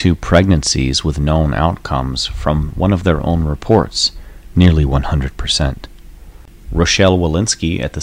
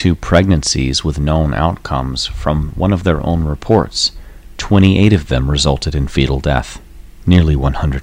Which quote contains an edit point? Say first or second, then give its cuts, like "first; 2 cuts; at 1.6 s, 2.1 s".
first; 1 cut; at 4.5 s